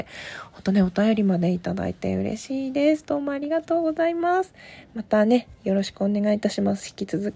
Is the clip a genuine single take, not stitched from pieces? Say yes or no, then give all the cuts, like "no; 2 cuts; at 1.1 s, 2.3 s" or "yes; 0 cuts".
yes; 0 cuts